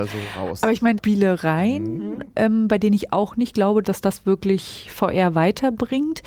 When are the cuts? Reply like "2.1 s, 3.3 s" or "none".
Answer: 1.0 s, 3.8 s